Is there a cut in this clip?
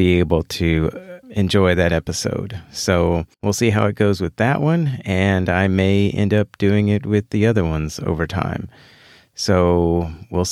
yes; 2 cuts; at 1.2 s, 3.3 s

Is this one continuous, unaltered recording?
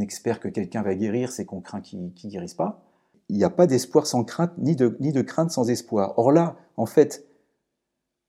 yes; 0 cuts

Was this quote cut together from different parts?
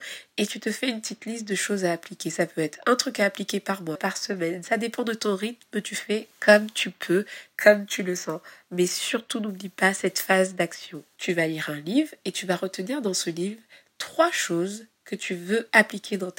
yes; 2 cuts; at 4.0 s, 11.2 s

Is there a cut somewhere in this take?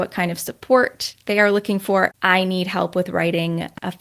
yes; 1 cut; at 2.1 s

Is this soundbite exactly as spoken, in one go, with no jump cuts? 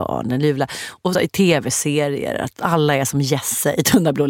yes; 0 cuts

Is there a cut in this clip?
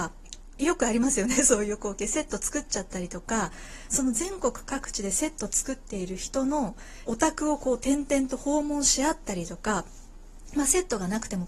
yes; 1 cut; at 7.1 s

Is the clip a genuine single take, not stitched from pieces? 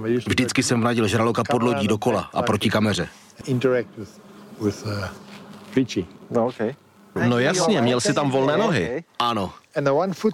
no; 2 cuts; at 3.4 s, 7.2 s

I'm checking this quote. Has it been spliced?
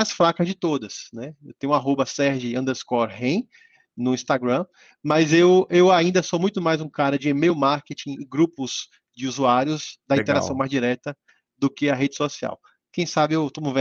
no; 0 cuts

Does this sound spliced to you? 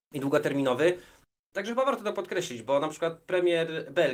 no; 0 cuts

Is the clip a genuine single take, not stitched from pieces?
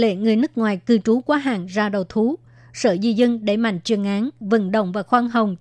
no; 1 cut; at 4.4 s

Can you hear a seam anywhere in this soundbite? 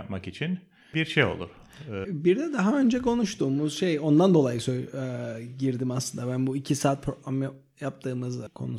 yes; 1 cut; at 2.0 s

